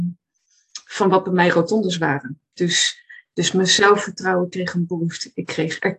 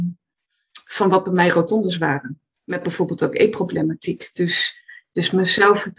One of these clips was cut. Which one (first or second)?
first